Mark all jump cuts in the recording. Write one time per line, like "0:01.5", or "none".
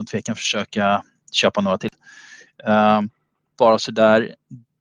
0:03.6